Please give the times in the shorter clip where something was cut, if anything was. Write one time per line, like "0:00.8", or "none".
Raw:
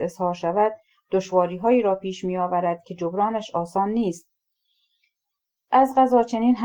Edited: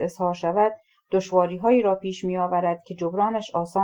none